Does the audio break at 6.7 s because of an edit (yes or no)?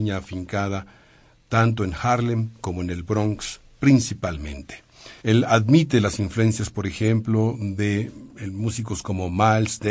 no